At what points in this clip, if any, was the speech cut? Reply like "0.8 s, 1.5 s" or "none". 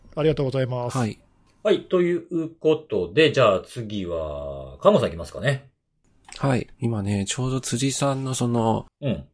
6.7 s